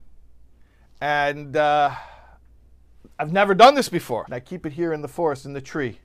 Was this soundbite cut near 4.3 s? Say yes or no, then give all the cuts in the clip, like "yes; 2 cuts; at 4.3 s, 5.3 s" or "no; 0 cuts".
yes; 1 cut; at 4.3 s